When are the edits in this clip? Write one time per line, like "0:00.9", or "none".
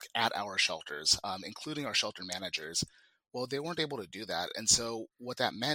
none